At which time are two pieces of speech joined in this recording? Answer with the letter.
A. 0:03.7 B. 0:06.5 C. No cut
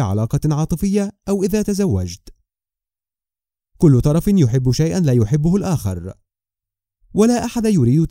A